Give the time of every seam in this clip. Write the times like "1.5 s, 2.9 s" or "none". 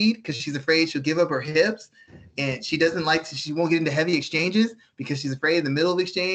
none